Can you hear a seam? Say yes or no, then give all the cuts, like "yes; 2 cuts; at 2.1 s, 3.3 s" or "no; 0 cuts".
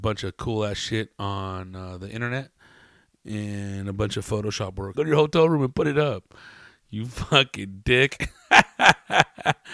yes; 1 cut; at 4.9 s